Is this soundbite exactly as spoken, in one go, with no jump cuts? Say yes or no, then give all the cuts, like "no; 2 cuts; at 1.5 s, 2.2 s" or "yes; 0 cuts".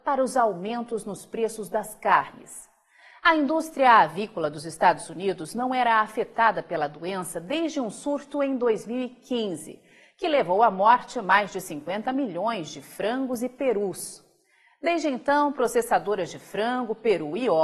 yes; 0 cuts